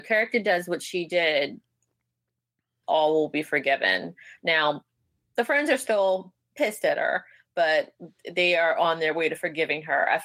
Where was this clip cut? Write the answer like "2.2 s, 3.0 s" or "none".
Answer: 2.8 s, 4.4 s